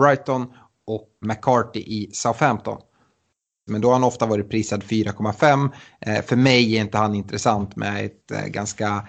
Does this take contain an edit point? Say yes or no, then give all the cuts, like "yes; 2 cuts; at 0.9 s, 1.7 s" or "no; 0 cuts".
yes; 2 cuts; at 1.2 s, 3.7 s